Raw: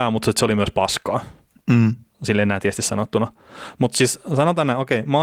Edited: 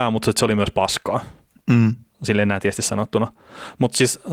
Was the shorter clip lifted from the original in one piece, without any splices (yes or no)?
yes